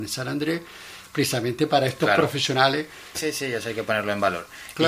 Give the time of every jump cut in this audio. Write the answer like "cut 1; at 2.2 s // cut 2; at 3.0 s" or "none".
cut 1; at 3.1 s